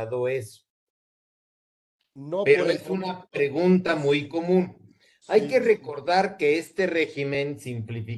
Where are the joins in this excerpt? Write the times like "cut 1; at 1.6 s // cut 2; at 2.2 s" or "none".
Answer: none

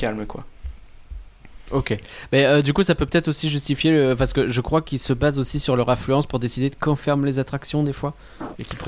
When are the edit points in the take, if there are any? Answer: none

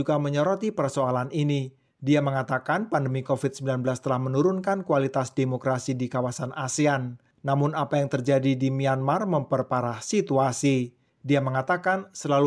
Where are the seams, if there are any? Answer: none

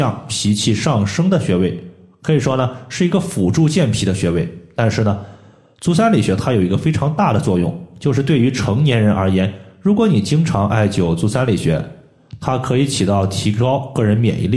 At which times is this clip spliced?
none

